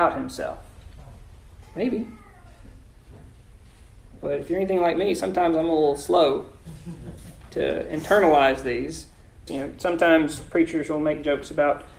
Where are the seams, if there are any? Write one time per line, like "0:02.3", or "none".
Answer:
0:01.6
0:09.5

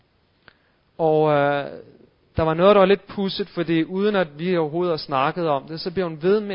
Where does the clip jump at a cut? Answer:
none

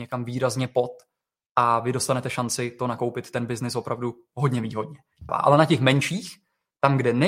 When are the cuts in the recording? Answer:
0:05.3

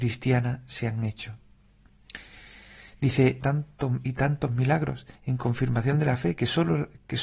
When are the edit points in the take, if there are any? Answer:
0:03.4
0:05.2

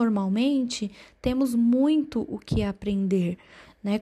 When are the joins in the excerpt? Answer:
none

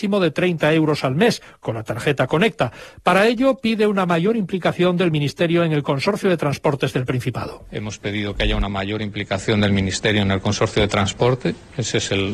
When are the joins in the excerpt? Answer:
none

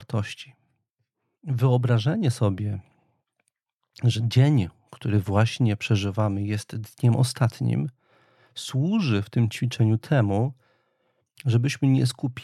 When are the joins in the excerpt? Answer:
0:01.3

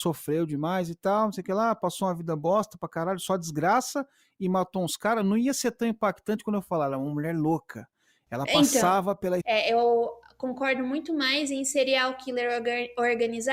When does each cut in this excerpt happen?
0:09.4

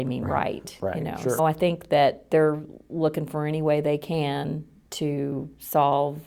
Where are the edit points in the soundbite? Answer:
0:01.4

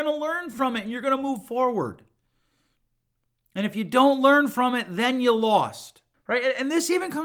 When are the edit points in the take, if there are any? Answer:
0:06.1

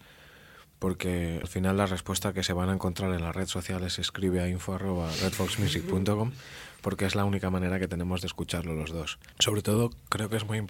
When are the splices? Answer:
0:01.4
0:09.3

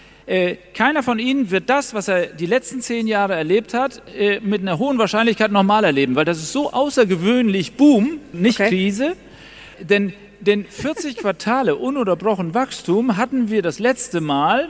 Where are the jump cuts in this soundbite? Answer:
0:08.3
0:09.7

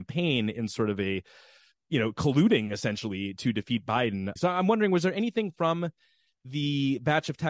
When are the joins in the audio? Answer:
0:04.4

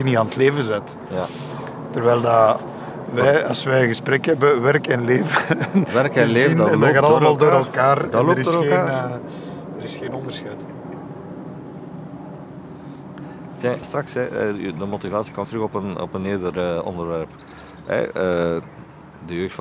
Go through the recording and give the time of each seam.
0:13.8
0:15.4

